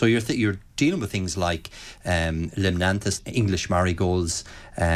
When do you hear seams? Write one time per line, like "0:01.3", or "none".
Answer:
0:03.2